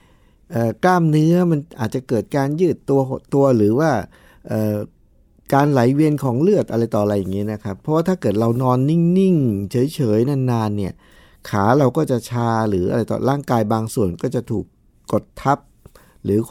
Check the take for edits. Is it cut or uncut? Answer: uncut